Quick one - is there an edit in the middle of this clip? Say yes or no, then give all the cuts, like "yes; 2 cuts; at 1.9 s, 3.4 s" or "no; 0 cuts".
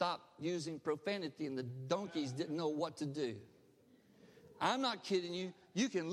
no; 0 cuts